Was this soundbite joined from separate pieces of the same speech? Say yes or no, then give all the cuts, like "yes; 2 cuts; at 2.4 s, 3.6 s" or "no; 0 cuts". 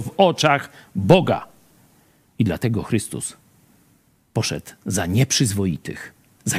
no; 0 cuts